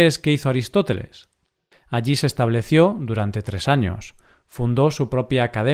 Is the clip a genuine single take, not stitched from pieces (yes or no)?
no